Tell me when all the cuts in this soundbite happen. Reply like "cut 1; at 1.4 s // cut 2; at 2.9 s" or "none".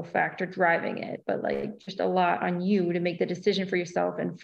none